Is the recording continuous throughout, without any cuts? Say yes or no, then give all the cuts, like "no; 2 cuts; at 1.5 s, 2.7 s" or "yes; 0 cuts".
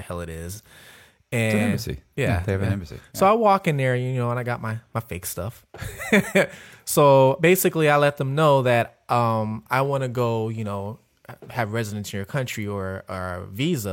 yes; 0 cuts